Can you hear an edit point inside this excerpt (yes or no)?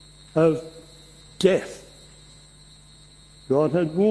no